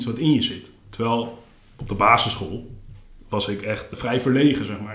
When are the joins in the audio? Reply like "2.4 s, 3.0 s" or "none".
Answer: 3.9 s